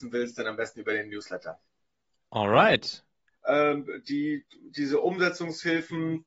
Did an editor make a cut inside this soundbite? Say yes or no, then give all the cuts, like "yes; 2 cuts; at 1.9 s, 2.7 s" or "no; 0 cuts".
yes; 1 cut; at 3.3 s